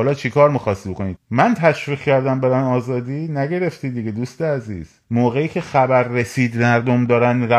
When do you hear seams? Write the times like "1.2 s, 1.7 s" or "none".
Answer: 1.2 s, 5.0 s